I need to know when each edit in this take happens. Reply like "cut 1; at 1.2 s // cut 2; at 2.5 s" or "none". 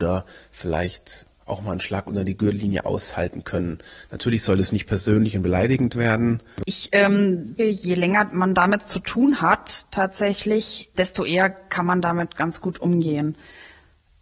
cut 1; at 7.6 s // cut 2; at 10.9 s